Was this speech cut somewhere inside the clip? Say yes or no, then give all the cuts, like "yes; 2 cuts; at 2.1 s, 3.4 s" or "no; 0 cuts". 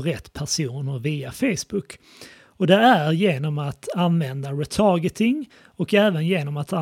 no; 0 cuts